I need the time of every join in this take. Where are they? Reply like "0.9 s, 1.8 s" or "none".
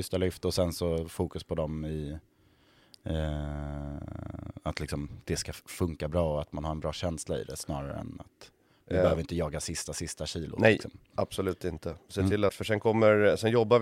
12.5 s